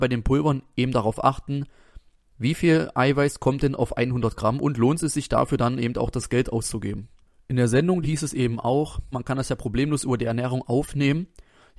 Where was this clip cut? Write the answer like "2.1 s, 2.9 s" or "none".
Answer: 8.0 s, 9.1 s